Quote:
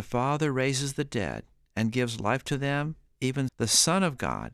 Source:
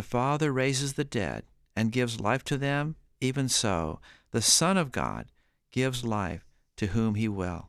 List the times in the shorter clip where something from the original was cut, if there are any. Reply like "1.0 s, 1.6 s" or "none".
3.5 s

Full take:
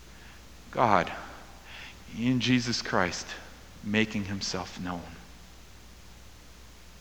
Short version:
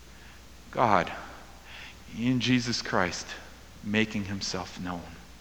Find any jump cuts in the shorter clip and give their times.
none

